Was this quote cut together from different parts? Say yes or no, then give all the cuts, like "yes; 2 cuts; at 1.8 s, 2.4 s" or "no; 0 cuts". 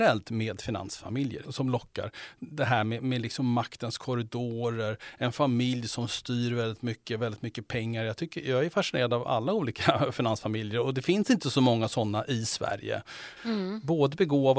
yes; 2 cuts; at 9.2 s, 13.4 s